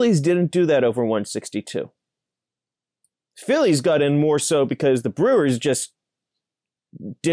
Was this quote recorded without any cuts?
yes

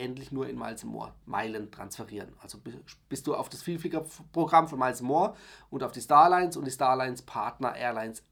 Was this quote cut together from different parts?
yes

